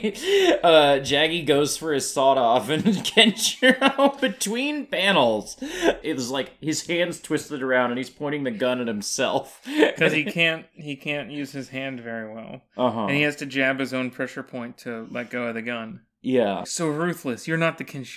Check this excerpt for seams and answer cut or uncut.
cut